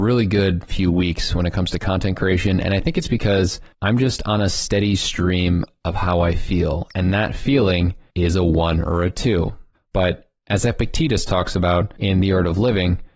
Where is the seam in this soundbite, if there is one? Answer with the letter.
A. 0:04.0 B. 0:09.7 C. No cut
B